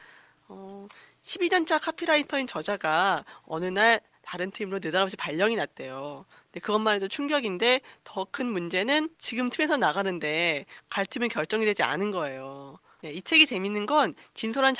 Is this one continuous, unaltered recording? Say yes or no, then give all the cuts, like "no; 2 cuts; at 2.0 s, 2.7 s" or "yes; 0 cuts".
no; 2 cuts; at 9.1 s, 13.0 s